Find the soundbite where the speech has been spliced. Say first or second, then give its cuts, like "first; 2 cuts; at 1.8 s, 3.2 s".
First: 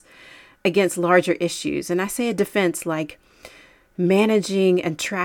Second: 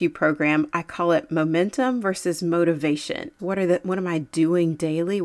second; 1 cut; at 3.4 s